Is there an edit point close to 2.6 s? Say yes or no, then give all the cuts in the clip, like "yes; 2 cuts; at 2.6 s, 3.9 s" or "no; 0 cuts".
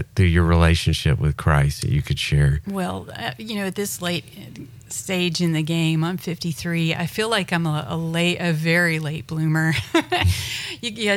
no; 0 cuts